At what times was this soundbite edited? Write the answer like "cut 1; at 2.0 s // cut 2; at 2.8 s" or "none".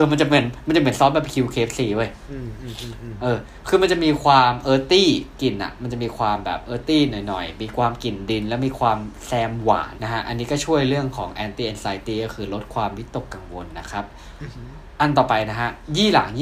cut 1; at 10.0 s